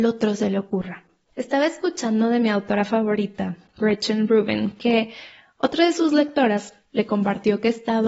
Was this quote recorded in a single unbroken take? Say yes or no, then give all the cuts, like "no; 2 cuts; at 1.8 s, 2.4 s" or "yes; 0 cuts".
no; 1 cut; at 1.3 s